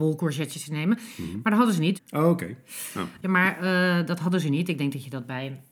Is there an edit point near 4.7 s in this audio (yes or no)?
no